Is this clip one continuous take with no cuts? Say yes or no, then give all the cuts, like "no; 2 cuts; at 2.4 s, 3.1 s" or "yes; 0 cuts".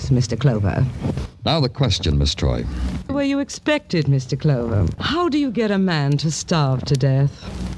no; 2 cuts; at 3.1 s, 5.0 s